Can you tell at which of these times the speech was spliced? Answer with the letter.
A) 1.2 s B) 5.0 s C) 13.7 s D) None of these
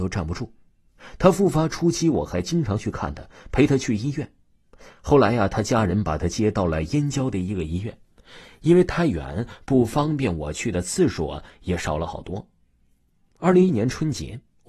C